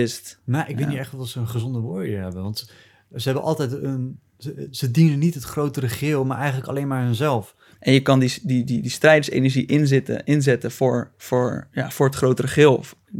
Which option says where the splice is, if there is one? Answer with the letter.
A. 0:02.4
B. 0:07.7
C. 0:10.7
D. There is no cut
B